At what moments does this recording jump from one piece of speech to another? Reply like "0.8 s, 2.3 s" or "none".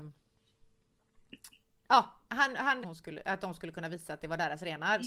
2.8 s